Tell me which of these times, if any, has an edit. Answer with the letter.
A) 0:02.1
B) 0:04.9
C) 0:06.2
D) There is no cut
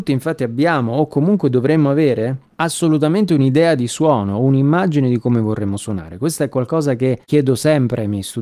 D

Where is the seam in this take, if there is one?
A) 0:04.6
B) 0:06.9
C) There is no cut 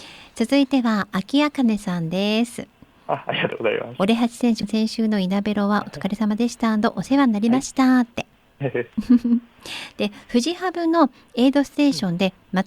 A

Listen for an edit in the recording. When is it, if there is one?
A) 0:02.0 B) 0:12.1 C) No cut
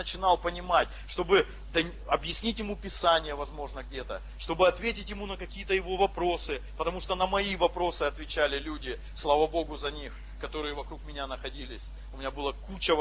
C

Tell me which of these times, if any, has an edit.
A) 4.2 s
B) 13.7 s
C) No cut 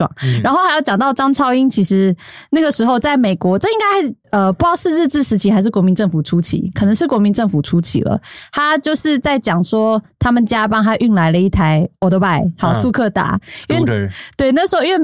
A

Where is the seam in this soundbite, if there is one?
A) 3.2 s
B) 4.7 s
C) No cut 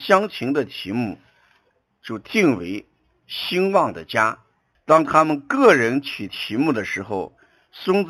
B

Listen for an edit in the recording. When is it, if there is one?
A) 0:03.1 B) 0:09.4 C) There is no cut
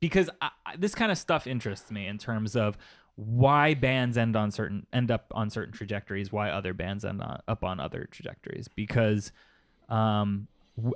C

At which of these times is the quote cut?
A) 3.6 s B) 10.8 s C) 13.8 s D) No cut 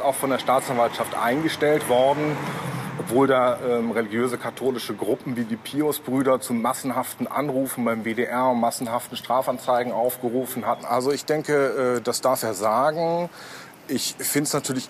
B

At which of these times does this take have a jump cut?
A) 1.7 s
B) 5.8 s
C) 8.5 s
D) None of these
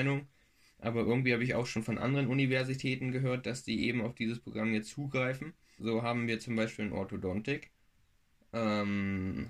B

